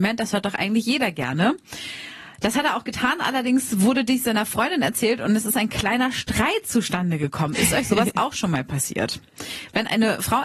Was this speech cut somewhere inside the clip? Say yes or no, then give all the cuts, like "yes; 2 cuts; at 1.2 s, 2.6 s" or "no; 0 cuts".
no; 0 cuts